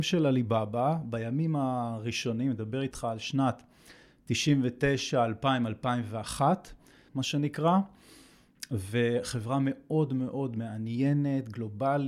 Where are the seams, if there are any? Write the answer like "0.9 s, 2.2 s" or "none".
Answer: 7.1 s